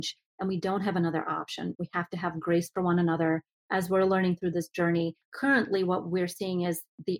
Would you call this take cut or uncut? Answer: cut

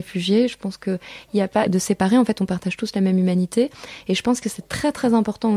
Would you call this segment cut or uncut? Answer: cut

